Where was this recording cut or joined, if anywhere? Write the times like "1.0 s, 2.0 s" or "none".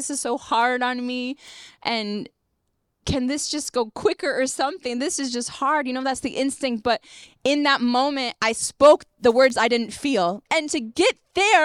10.5 s